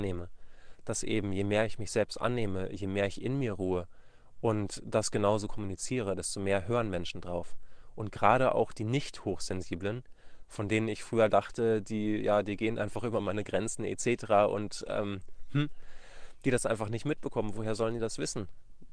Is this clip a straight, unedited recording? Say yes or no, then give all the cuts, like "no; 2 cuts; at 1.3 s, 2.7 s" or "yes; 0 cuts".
yes; 0 cuts